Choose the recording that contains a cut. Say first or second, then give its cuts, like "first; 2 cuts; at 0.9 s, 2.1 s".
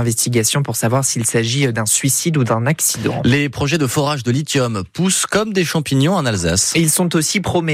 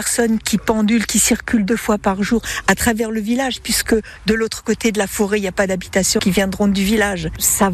second; 1 cut; at 6.2 s